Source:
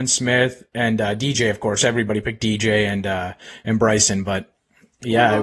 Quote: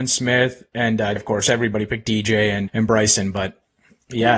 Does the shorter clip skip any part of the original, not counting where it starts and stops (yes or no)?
yes